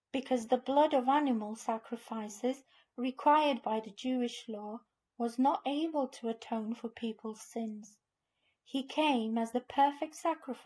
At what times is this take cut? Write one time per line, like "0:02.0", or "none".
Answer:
none